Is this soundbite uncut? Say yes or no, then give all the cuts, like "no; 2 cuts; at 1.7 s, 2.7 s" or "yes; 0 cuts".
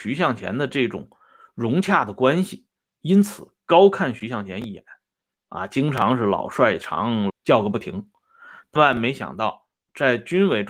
no; 2 cuts; at 7.3 s, 8.8 s